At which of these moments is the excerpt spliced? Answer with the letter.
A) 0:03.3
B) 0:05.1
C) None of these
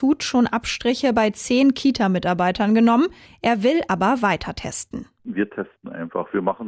A